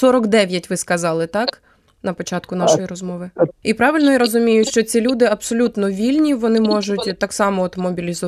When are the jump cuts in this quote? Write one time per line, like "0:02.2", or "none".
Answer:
0:03.6